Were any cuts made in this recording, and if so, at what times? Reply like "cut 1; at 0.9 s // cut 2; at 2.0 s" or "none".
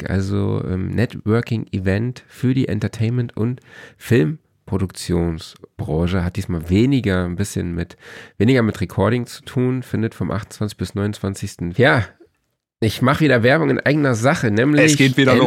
cut 1; at 11.8 s